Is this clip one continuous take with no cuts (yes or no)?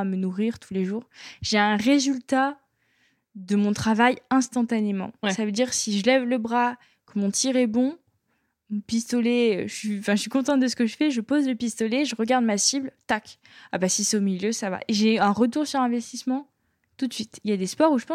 yes